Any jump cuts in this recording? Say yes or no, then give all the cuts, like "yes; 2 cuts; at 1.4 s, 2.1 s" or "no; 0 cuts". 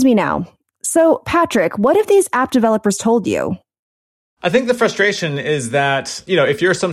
no; 0 cuts